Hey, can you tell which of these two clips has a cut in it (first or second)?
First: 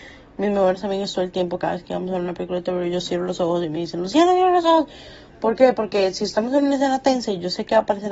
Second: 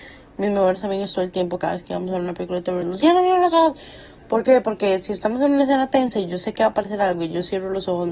second